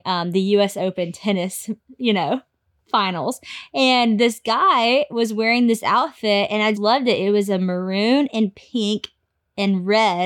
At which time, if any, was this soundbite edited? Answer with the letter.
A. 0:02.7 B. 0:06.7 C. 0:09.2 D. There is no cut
B